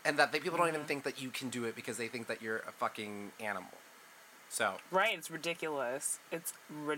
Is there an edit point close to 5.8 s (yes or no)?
no